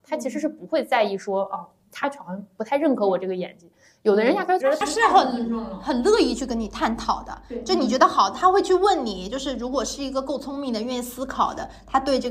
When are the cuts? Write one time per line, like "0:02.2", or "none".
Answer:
0:04.6